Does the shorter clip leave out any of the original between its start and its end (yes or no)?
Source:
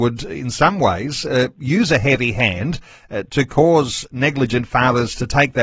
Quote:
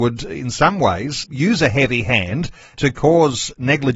yes